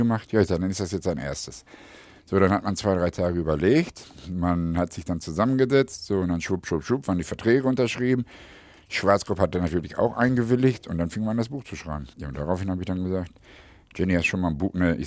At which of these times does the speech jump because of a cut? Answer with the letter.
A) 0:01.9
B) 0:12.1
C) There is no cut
B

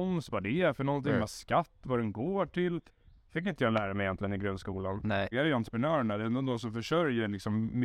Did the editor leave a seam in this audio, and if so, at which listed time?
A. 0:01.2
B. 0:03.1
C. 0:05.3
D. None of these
C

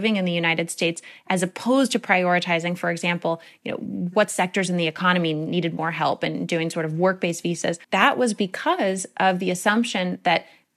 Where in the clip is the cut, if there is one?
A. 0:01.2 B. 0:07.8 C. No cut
B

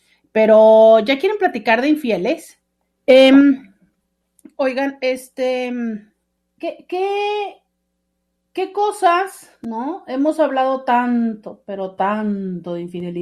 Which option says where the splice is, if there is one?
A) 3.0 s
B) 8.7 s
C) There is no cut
A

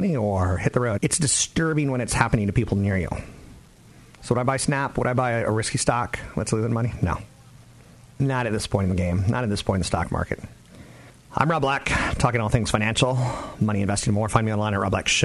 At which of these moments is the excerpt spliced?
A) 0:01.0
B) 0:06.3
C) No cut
A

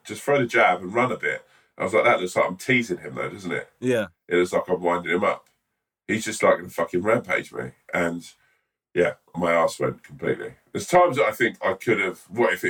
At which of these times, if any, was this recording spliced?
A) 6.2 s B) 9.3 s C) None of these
B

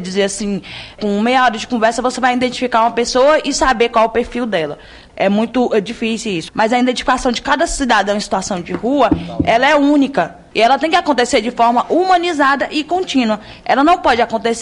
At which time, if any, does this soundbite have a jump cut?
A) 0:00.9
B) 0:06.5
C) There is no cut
B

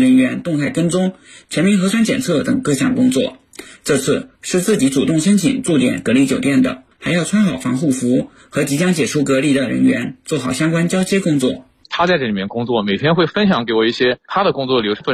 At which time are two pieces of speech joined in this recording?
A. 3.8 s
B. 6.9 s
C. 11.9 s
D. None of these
B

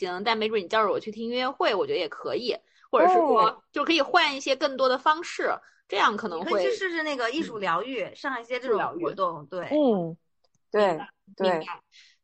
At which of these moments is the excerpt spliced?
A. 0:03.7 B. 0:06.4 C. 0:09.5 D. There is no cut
D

